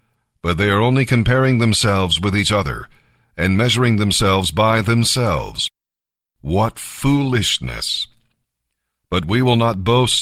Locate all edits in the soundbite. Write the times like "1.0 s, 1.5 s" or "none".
none